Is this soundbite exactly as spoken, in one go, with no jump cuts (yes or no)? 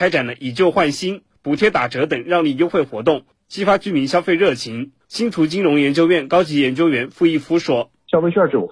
no